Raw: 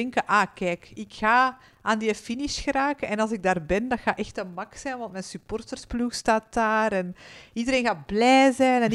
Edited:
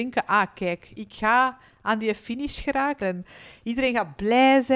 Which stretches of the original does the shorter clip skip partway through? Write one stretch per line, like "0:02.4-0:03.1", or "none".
0:03.0-0:06.9